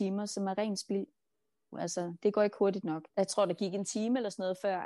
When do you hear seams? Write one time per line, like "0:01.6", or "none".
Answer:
0:01.7
0:03.1